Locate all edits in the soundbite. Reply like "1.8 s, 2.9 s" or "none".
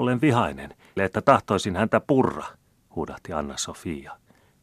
1.0 s